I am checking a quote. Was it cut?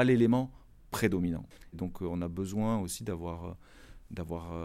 yes; 1 cut; at 1.7 s

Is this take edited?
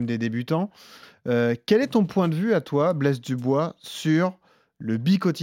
no; 0 cuts

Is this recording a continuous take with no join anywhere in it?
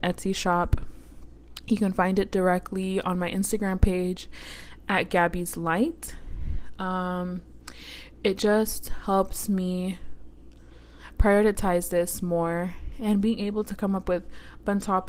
yes; 0 cuts

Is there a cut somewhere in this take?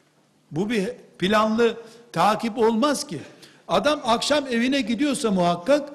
no; 0 cuts

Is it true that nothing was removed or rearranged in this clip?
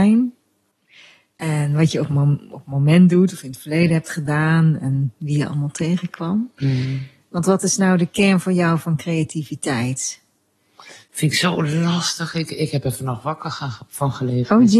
yes; 0 cuts

